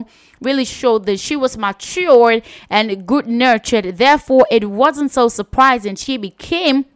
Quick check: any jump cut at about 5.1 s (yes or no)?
no